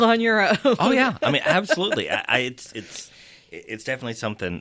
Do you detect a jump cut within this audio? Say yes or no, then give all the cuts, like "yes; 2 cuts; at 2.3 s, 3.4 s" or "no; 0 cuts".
no; 0 cuts